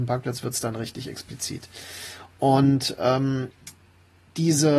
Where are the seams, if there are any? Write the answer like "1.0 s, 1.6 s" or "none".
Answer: none